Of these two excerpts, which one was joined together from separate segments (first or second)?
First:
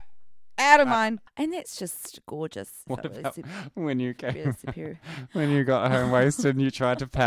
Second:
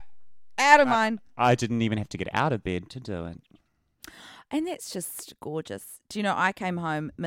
first